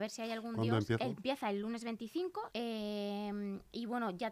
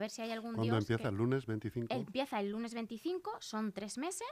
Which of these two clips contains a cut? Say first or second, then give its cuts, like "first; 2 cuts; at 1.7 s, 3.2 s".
first; 2 cuts; at 1.0 s, 2.5 s